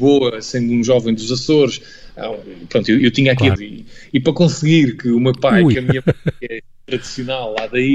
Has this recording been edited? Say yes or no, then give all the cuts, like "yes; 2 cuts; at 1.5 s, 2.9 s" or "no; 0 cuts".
yes; 2 cuts; at 3.6 s, 5.7 s